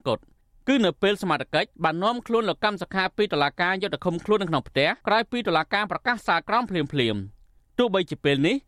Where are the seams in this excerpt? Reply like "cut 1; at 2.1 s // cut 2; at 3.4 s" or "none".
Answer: cut 1; at 1.7 s // cut 2; at 5.0 s